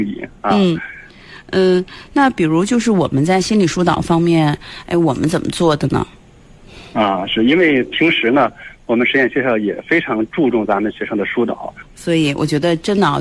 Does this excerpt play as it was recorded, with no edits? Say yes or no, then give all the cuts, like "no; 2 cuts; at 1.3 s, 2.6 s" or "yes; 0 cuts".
no; 1 cut; at 11.8 s